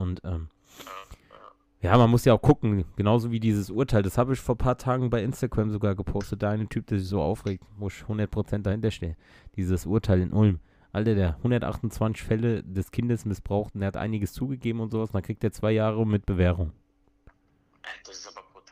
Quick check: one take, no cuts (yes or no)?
yes